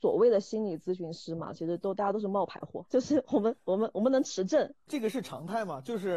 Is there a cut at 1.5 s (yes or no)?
no